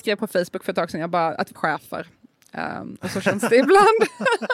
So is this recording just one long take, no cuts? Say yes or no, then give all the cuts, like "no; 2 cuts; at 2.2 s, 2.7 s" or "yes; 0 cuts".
no; 1 cut; at 1.5 s